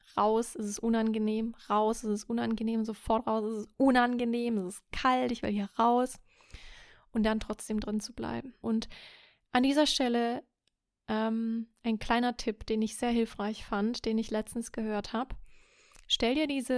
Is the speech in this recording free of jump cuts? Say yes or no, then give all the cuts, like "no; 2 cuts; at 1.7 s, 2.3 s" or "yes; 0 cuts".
no; 1 cut; at 8.6 s